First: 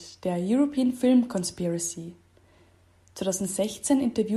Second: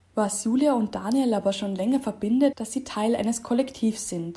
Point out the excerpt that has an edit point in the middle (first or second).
second